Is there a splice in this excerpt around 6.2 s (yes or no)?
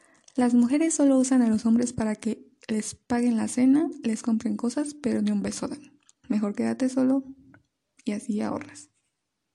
yes